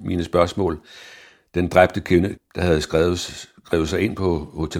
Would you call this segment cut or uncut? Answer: cut